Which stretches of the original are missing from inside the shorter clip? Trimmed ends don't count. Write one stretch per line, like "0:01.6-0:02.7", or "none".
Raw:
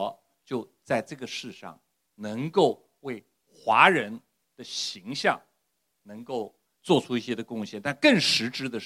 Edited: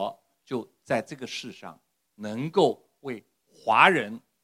none